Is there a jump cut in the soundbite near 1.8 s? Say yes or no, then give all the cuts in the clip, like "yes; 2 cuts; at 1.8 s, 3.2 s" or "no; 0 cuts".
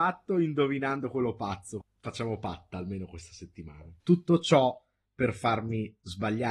yes; 2 cuts; at 1.8 s, 4.0 s